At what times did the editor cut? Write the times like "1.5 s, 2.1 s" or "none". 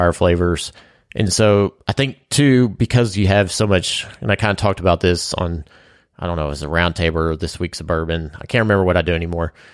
none

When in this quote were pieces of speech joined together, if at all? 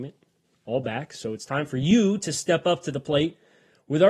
none

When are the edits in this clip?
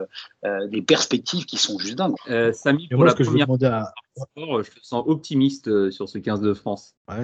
2.2 s

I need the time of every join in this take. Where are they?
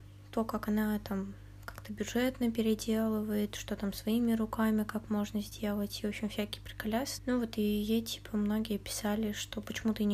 7.2 s

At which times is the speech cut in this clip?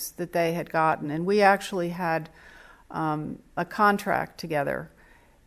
none

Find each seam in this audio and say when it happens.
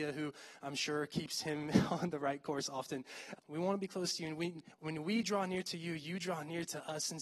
3.4 s, 4.8 s

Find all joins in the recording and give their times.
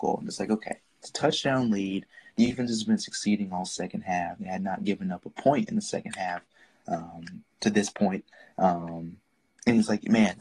7.5 s

